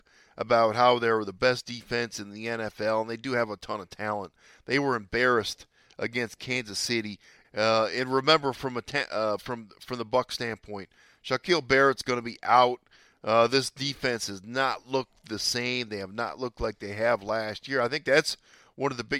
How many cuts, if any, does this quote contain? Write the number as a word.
one